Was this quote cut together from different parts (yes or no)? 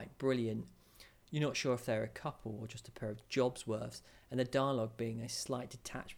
no